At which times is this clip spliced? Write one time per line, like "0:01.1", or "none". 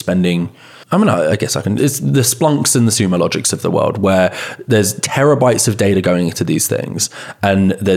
0:01.8